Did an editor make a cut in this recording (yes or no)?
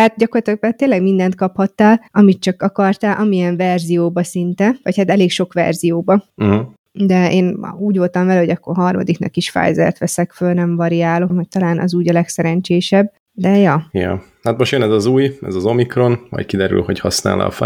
yes